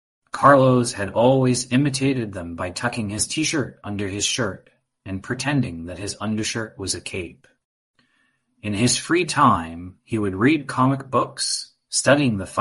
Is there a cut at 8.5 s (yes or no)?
no